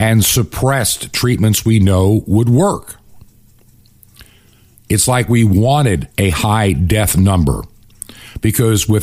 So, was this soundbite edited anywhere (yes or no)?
yes